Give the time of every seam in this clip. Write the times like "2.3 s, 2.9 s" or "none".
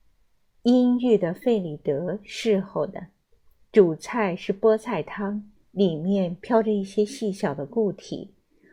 5.5 s